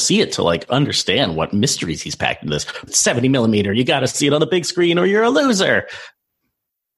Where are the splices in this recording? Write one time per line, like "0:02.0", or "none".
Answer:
0:02.9